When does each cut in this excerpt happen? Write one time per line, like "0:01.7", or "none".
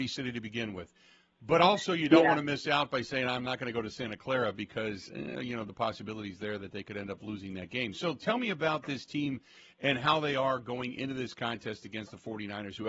none